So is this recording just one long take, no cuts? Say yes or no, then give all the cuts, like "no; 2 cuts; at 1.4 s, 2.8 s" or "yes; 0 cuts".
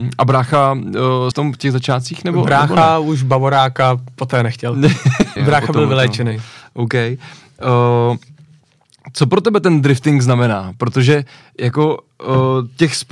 no; 2 cuts; at 1.3 s, 5.4 s